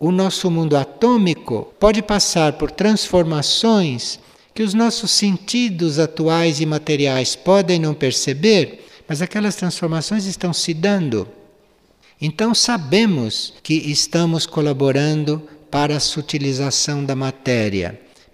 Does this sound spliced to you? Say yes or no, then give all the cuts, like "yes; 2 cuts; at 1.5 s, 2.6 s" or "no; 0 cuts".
yes; 3 cuts; at 1.7 s, 12.0 s, 13.6 s